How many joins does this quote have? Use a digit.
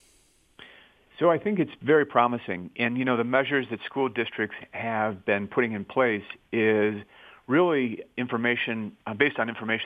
0